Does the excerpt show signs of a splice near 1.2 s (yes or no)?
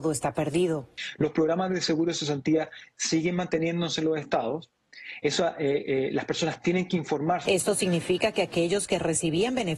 no